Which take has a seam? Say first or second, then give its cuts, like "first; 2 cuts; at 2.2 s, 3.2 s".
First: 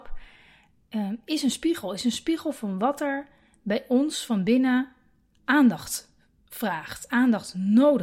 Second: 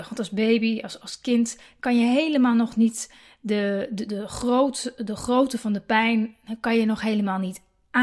second; 1 cut; at 4.1 s